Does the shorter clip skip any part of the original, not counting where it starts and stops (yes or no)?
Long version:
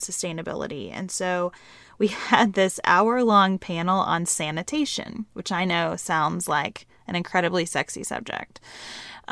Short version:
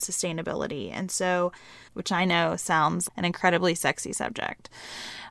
yes